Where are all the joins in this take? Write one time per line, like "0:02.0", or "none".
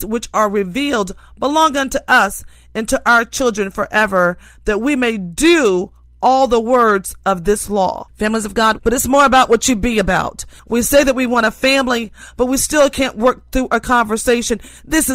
0:08.8
0:10.6